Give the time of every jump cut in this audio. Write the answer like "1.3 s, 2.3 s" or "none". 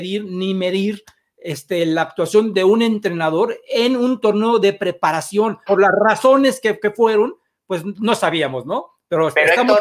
5.7 s